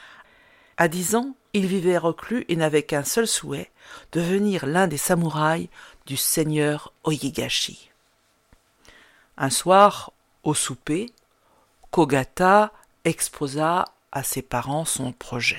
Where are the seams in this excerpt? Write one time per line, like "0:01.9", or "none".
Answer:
none